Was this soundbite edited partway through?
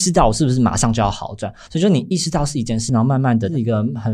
yes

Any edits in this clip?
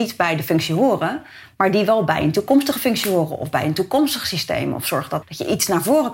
yes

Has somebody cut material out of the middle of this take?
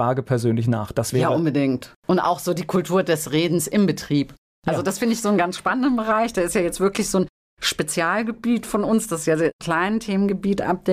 no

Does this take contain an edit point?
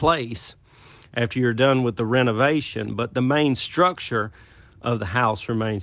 no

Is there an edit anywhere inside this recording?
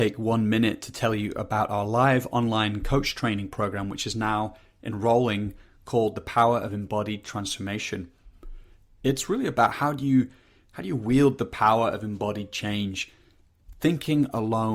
no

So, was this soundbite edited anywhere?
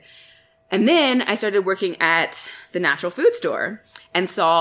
no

